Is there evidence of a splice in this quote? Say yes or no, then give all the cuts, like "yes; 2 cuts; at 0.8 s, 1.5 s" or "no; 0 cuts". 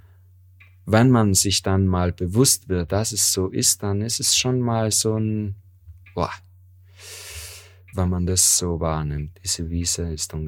yes; 2 cuts; at 7.9 s, 9.3 s